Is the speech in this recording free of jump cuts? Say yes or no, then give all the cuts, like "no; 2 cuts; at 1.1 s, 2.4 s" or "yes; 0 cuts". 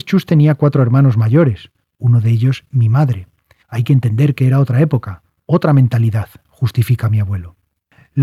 no; 1 cut; at 3.6 s